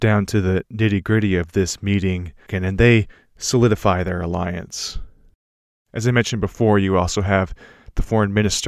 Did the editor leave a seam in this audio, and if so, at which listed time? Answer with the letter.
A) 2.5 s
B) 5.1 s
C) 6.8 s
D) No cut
A